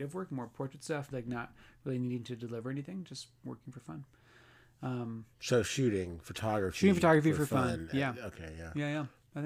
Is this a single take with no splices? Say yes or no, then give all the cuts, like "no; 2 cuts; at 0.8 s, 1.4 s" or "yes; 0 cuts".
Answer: no; 1 cut; at 1.1 s